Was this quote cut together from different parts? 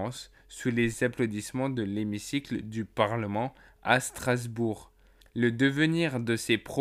yes; 1 cut; at 5.2 s

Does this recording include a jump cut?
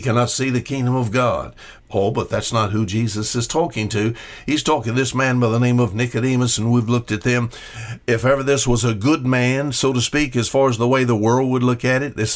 yes; 1 cut; at 1.8 s

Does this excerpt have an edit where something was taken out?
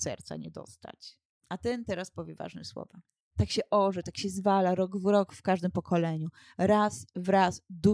no; 0 cuts

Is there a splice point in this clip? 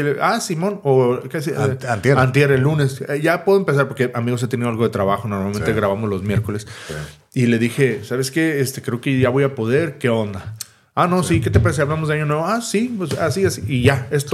no; 0 cuts

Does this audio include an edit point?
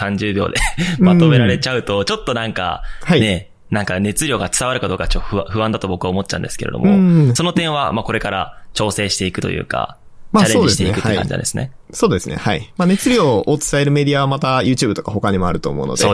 no; 0 cuts

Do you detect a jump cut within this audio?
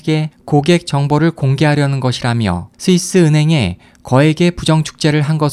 yes; 1 cut; at 2.7 s

